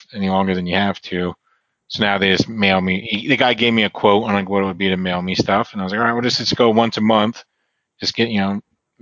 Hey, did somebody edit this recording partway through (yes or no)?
no